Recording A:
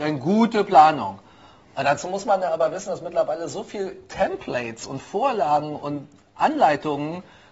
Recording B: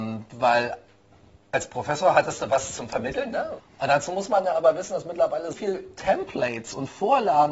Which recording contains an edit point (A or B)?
B